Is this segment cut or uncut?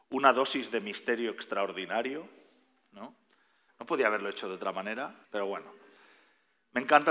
cut